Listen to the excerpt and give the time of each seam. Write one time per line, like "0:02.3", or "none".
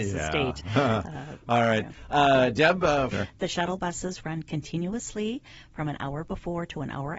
0:03.1